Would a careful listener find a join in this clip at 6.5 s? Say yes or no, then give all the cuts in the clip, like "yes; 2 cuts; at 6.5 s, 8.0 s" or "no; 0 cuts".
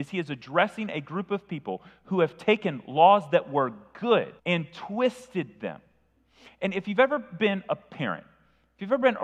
no; 1 cut; at 4.4 s